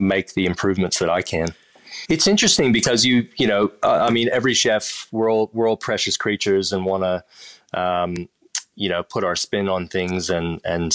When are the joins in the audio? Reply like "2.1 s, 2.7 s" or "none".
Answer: 2.0 s